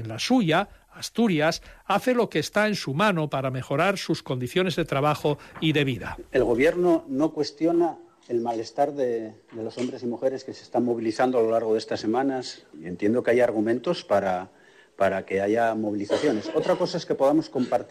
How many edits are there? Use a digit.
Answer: 0